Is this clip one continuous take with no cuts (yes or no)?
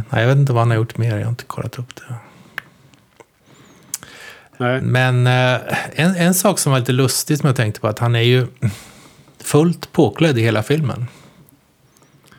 no